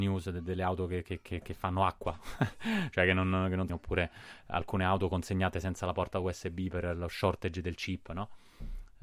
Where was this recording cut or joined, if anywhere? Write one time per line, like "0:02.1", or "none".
0:03.7